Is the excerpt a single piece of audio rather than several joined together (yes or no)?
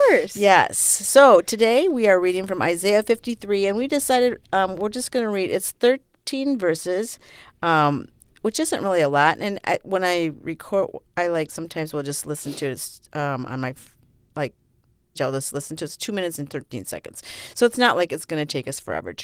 no